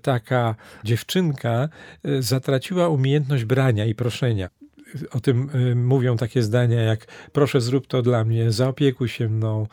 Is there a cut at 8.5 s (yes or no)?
no